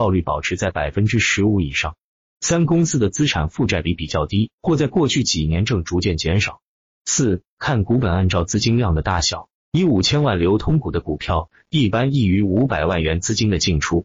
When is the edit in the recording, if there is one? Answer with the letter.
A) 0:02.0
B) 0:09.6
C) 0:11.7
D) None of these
B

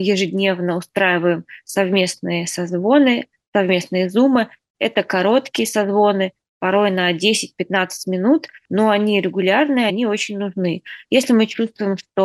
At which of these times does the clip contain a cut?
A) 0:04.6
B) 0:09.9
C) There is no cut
B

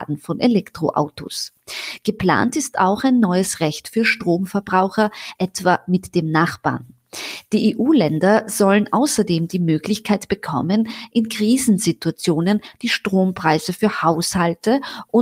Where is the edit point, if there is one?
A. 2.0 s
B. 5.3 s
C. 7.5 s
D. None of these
B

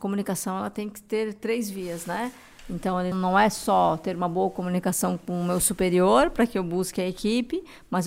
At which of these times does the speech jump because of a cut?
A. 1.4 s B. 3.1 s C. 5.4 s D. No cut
B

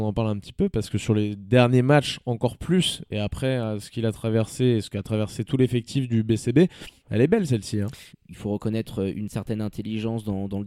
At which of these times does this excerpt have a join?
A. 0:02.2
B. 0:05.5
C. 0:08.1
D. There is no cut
C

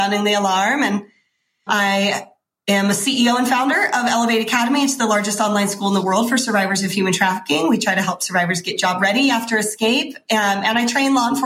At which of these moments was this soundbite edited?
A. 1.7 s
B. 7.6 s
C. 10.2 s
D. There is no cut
A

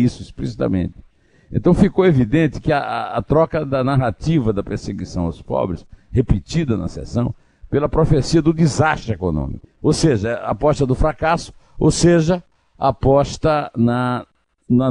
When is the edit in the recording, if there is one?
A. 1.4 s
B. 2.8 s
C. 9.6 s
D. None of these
C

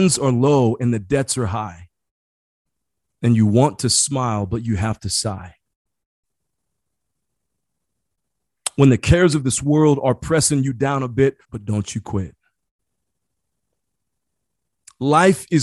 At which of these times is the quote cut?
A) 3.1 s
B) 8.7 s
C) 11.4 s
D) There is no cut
C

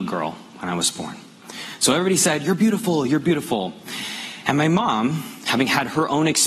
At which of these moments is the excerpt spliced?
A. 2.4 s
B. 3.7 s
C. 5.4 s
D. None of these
D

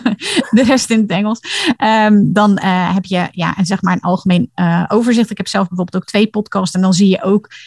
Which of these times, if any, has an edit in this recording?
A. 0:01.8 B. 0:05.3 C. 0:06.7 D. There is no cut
D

